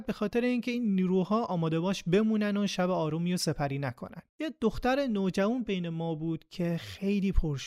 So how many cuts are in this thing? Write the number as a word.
one